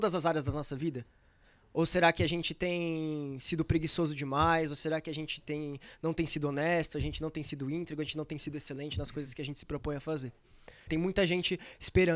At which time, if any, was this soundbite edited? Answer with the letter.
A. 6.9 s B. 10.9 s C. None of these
B